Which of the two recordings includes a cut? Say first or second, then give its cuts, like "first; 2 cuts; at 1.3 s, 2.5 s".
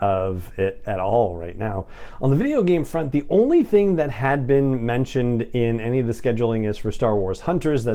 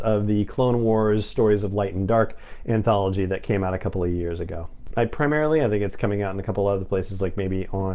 second; 1 cut; at 4.9 s